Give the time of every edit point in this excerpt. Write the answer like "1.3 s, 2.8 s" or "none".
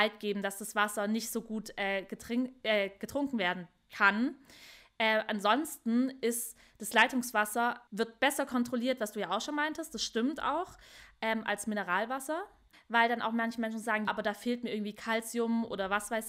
7.9 s, 14.1 s